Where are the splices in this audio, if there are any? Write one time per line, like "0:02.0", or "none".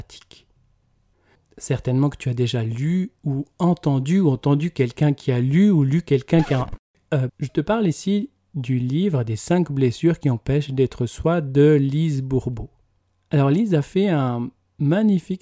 0:07.3